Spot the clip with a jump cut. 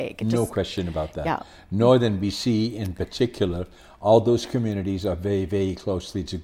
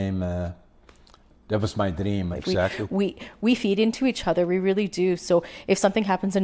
second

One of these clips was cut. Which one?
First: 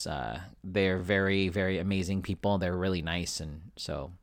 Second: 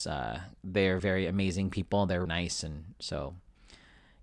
second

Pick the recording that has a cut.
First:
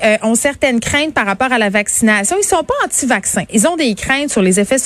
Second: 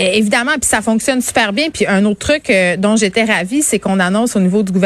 first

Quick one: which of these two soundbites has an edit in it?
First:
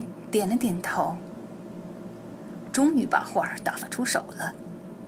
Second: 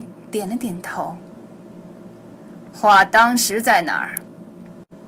first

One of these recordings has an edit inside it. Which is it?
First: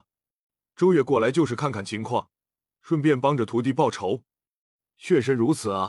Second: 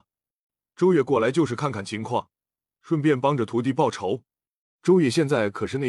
second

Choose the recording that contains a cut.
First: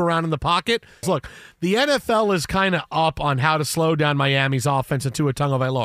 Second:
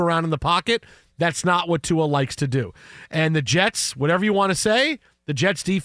first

